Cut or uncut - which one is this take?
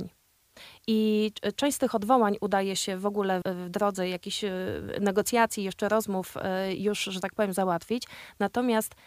cut